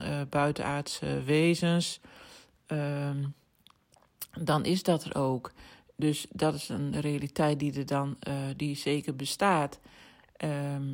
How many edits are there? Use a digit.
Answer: 0